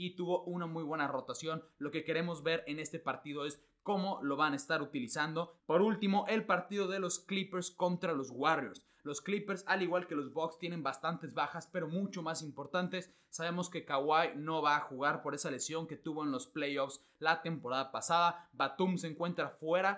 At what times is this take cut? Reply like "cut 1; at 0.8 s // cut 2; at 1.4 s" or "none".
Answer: cut 1; at 5.6 s